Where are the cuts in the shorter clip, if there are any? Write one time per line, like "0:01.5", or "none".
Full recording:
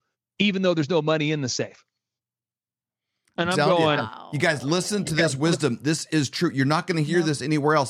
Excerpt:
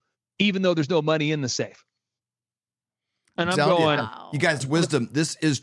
0:04.6